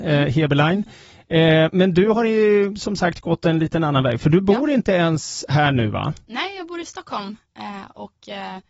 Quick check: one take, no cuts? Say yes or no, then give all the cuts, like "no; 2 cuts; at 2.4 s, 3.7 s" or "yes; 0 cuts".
yes; 0 cuts